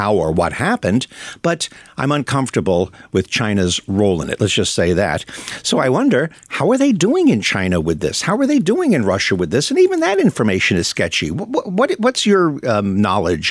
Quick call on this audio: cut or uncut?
uncut